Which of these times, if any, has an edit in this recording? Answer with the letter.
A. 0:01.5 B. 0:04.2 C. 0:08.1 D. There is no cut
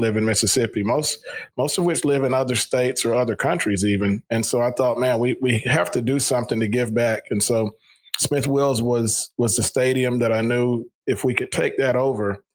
B